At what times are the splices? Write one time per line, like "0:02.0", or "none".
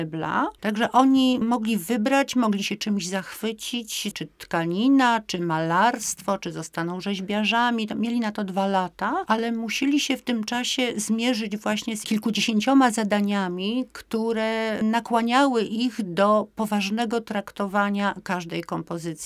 0:04.1